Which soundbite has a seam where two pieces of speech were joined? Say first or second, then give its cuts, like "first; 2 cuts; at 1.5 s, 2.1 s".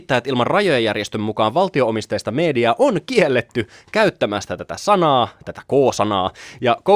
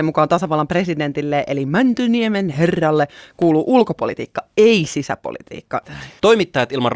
second; 1 cut; at 5.8 s